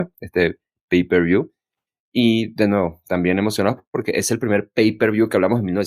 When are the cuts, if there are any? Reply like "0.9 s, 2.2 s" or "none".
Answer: none